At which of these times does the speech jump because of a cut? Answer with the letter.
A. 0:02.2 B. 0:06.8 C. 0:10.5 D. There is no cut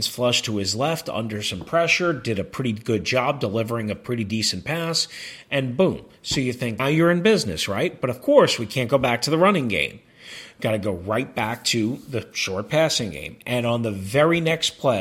B